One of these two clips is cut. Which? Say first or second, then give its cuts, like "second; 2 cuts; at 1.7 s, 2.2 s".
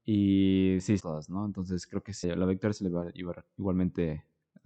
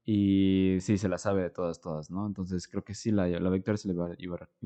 first; 2 cuts; at 1.0 s, 2.2 s